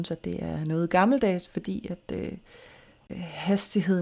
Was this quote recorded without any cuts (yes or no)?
yes